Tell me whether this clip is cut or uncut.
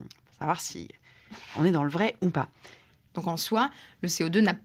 cut